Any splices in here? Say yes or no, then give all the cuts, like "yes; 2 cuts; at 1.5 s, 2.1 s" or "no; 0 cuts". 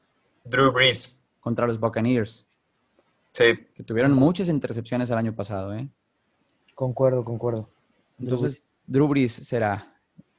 no; 0 cuts